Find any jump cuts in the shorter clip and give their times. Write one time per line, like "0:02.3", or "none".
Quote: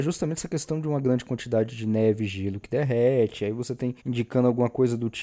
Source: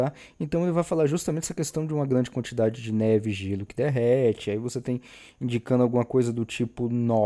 0:04.0